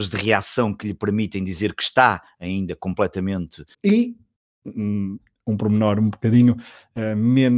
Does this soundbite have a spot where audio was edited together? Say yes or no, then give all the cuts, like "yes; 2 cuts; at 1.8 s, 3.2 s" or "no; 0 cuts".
yes; 1 cut; at 3.7 s